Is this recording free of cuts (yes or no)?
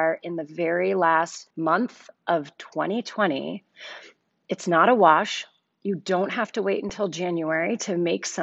no